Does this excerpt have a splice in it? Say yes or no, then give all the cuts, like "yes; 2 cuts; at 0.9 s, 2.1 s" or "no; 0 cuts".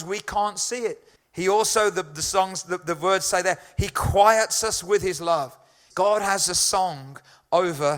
yes; 2 cuts; at 1.2 s, 5.9 s